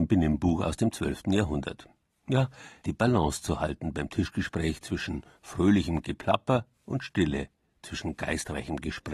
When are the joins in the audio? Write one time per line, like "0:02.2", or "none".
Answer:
0:02.8